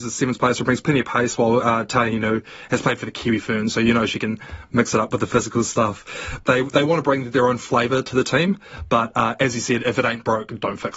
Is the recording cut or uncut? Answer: cut